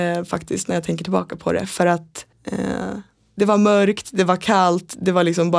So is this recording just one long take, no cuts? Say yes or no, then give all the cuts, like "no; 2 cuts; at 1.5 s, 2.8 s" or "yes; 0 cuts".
no; 1 cut; at 2.3 s